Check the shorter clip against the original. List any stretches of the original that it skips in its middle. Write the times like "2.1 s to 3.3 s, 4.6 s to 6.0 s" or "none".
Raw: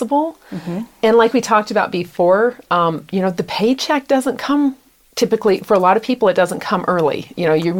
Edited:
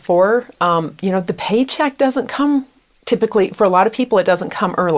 none